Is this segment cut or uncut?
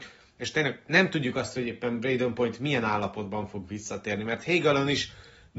uncut